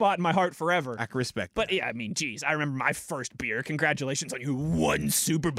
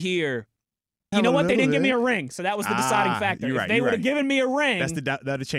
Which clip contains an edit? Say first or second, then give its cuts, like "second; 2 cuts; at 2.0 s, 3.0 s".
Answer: second; 1 cut; at 1.1 s